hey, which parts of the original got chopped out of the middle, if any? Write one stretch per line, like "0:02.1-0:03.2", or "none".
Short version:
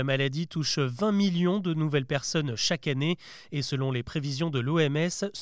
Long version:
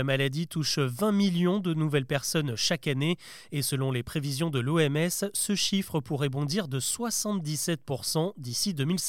none